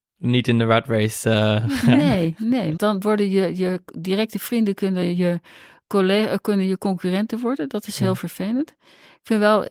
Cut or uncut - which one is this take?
cut